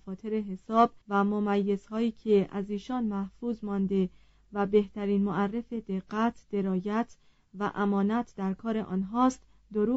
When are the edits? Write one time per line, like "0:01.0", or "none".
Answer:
0:01.0